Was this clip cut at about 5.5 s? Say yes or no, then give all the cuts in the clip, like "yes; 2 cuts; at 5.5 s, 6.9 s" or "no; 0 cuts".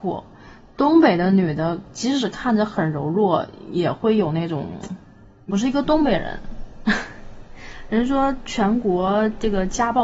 yes; 1 cut; at 5.5 s